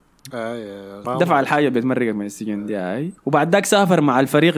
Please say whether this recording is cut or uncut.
cut